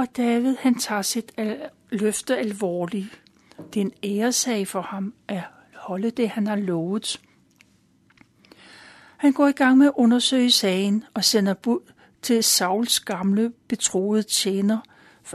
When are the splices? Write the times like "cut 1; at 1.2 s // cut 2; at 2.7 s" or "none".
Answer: none